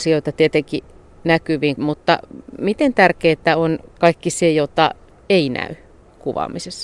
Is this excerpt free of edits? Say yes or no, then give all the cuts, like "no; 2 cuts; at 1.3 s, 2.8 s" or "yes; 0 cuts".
no; 1 cut; at 1.8 s